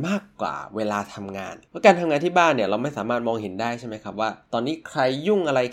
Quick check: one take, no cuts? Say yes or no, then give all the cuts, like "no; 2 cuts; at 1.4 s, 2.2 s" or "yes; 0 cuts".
no; 1 cut; at 1.7 s